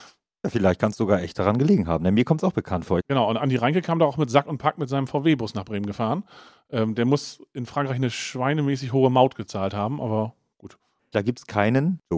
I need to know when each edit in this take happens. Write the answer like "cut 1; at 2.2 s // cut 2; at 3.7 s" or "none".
cut 1; at 3.0 s // cut 2; at 11.1 s